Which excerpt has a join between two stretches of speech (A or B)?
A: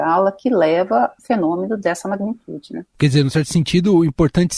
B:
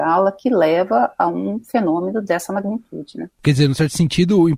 A